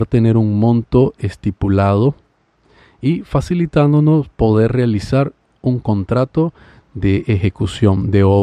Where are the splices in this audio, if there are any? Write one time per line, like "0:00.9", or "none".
none